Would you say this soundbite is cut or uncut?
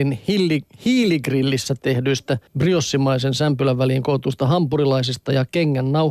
cut